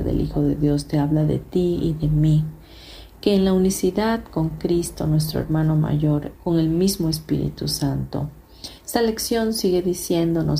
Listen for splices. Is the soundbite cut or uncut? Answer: cut